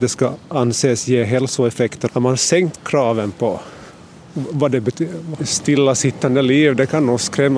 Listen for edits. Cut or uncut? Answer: cut